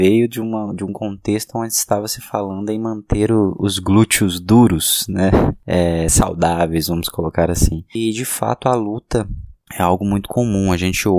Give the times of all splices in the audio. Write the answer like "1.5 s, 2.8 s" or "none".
none